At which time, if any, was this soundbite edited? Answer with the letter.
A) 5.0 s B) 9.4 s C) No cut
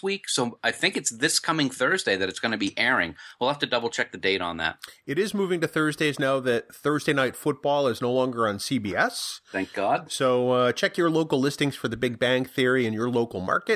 C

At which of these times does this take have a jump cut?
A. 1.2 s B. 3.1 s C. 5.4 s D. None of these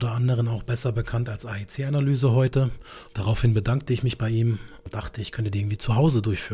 B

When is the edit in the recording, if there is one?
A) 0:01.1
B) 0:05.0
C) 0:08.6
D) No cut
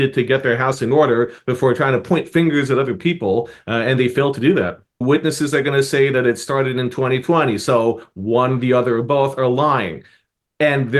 B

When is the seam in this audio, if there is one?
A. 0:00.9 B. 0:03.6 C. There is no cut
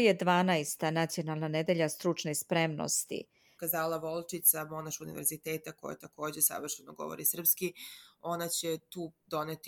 B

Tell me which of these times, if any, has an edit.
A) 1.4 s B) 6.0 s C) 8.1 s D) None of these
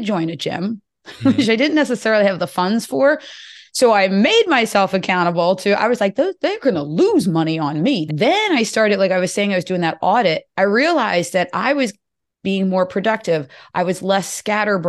C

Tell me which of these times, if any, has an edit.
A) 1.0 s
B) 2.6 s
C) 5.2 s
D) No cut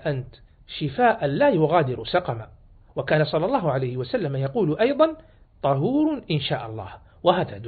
D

